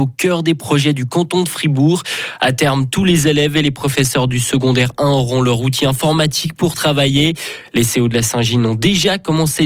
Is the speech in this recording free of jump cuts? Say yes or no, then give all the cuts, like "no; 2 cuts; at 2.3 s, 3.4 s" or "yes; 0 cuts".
yes; 0 cuts